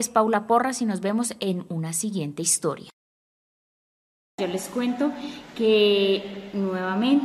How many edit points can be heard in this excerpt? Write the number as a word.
zero